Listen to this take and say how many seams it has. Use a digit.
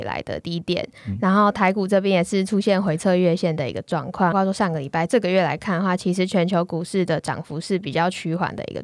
1